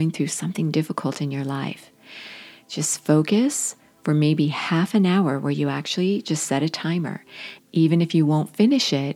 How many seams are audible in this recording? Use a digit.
1